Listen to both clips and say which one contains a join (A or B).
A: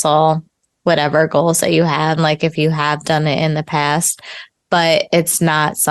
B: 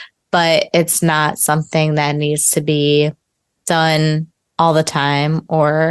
A